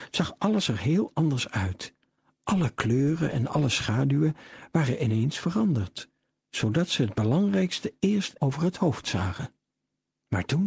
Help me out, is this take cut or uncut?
cut